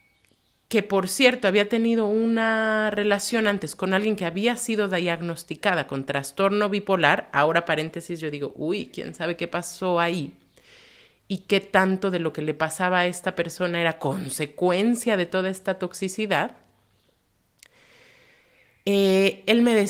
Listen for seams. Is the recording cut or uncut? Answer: uncut